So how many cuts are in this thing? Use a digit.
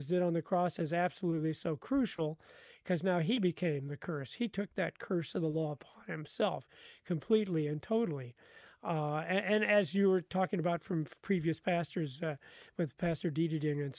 0